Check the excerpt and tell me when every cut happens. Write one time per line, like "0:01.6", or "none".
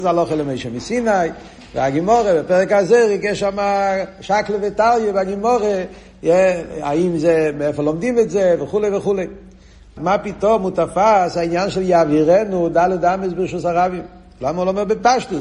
0:10.0